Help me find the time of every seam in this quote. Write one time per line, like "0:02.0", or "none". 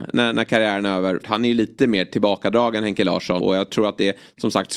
0:01.2
0:03.4